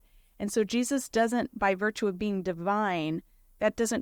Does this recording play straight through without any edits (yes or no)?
yes